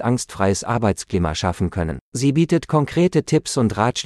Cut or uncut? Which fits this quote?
cut